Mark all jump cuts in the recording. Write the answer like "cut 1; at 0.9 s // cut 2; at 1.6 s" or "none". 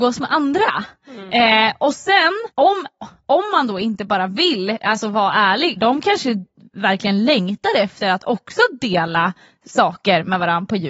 cut 1; at 2.5 s // cut 2; at 5.8 s